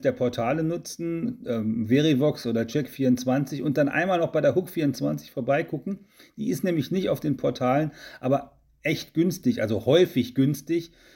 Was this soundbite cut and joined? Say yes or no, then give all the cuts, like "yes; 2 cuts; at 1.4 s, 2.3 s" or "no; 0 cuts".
no; 0 cuts